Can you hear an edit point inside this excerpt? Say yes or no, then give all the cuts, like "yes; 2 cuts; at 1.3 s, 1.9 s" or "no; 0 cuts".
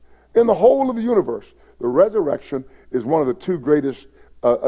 no; 0 cuts